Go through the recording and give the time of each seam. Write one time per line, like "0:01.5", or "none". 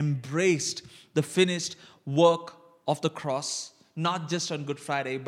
none

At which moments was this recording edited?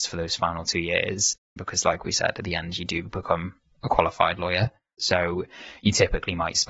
0:01.6
0:05.0

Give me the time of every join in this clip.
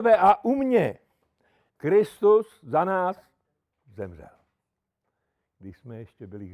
0:01.7

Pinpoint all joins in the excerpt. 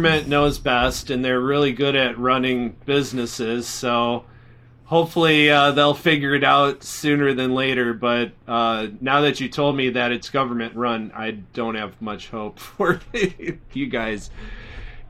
none

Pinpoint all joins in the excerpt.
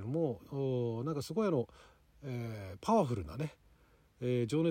none

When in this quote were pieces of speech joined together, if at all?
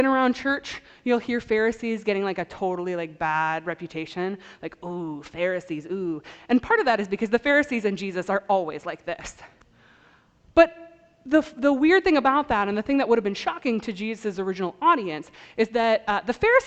none

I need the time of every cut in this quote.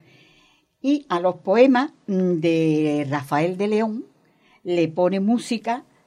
none

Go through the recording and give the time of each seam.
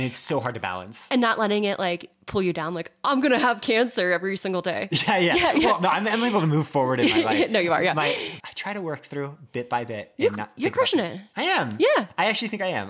0:08.4

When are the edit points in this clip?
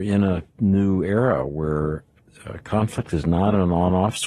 none

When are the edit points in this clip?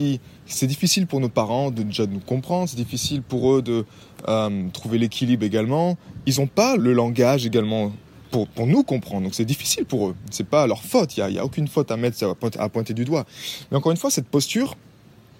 0:06.8

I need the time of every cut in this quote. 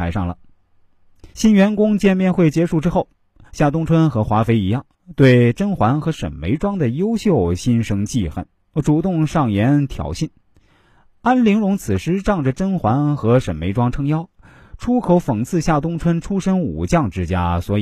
0:01.3

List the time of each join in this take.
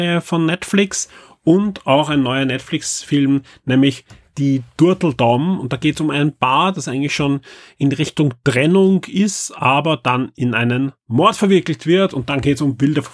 none

